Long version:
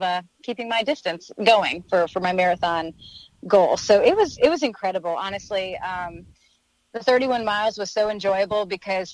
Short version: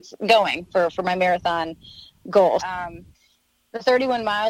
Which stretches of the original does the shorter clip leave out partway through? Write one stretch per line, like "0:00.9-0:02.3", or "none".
0:03.8-0:05.8